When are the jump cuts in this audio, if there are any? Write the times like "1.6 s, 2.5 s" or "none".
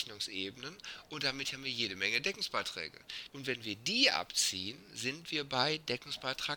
3.3 s